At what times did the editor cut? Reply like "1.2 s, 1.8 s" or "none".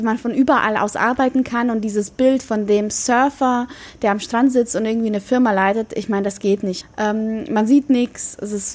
6.8 s